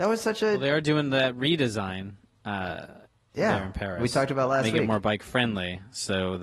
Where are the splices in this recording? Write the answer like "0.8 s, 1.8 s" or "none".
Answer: none

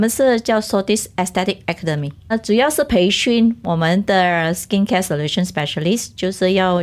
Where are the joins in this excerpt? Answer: 2.3 s

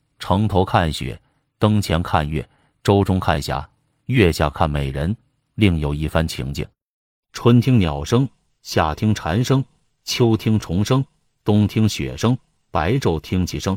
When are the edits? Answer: none

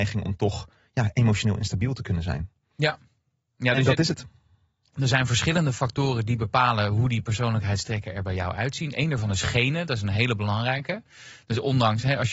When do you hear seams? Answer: none

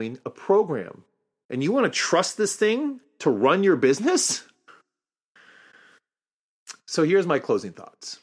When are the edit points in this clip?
1.4 s

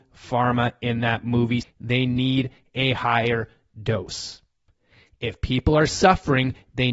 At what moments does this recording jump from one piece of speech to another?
1.6 s

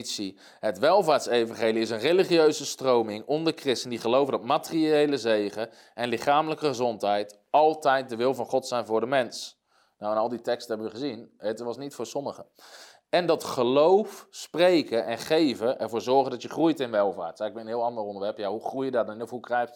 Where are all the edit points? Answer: none

